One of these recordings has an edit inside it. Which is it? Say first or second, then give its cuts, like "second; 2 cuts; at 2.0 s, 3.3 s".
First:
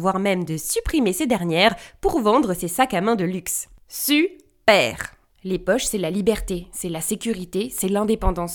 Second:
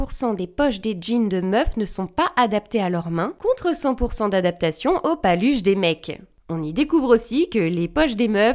first; 1 cut; at 5.3 s